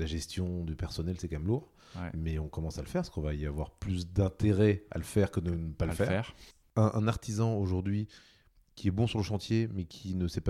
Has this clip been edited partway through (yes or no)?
no